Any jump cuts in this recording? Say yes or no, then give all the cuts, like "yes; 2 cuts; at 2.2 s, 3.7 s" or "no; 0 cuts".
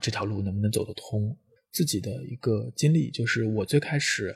yes; 1 cut; at 1.6 s